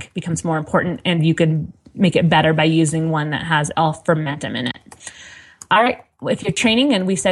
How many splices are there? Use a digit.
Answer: 1